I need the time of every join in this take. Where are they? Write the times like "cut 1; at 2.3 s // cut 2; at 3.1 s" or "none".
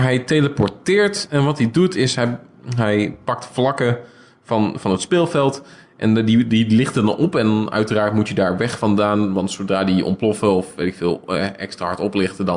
none